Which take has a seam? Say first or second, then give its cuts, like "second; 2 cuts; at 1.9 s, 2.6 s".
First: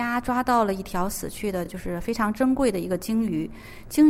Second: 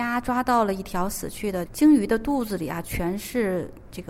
second; 1 cut; at 1.7 s